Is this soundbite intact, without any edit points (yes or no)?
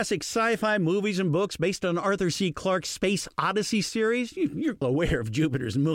no